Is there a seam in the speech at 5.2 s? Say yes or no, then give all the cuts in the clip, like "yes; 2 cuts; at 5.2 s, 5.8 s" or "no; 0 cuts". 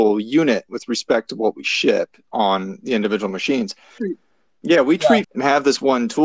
yes; 2 cuts; at 4.0 s, 5.2 s